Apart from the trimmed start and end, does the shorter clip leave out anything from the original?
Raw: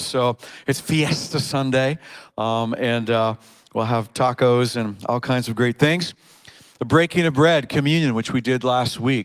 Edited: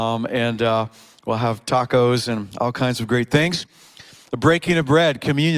no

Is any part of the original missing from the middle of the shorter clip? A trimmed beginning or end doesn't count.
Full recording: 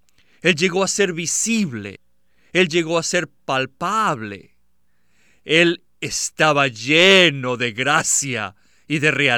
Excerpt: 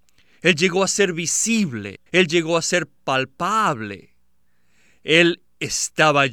yes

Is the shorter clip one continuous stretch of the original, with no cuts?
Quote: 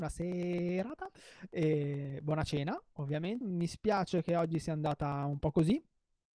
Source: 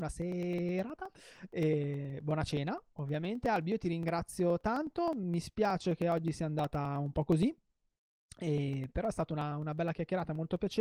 no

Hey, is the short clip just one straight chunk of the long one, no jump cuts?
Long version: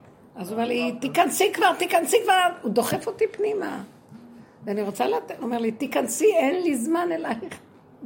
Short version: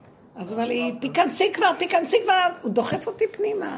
yes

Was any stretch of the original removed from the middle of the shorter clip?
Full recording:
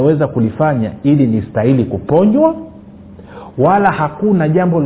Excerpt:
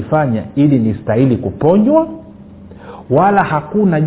no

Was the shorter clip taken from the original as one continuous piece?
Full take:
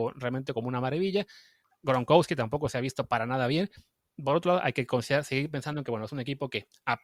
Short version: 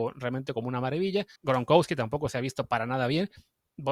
no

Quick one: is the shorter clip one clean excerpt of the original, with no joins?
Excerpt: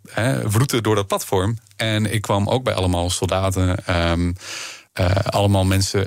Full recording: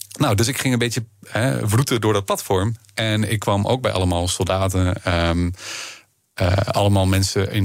no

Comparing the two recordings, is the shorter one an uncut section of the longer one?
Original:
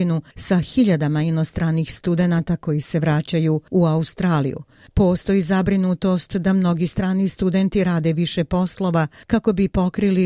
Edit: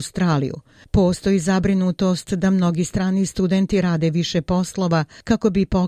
yes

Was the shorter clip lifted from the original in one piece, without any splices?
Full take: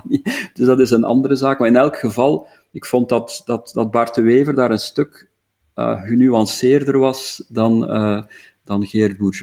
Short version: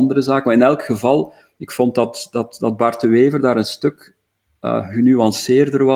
yes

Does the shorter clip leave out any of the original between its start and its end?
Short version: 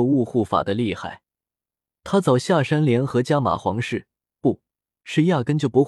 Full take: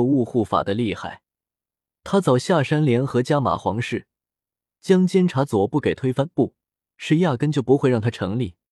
yes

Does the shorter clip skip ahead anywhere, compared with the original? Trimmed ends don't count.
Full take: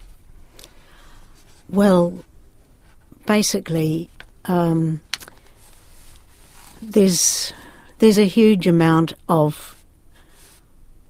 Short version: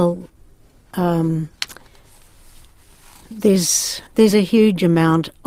yes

